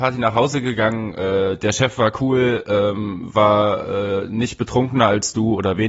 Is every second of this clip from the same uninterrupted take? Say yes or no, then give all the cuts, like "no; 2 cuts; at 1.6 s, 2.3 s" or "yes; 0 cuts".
yes; 0 cuts